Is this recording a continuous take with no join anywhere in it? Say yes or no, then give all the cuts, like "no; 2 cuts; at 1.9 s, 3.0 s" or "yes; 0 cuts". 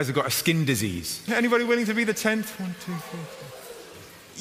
no; 1 cut; at 1.3 s